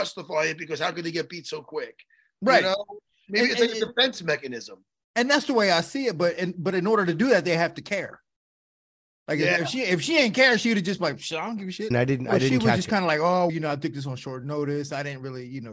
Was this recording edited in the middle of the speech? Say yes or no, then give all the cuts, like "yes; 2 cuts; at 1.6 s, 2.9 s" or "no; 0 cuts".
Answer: yes; 2 cuts; at 11.9 s, 13.5 s